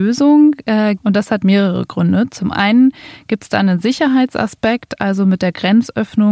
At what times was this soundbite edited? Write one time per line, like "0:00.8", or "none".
0:01.0